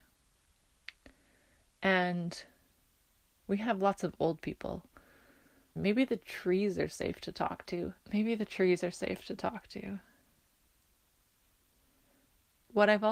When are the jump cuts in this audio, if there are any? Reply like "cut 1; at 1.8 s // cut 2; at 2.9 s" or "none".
cut 1; at 5.8 s // cut 2; at 8.0 s